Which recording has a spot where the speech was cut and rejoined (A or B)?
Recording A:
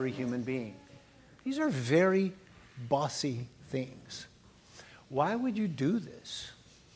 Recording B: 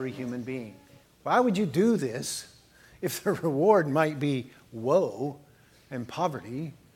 B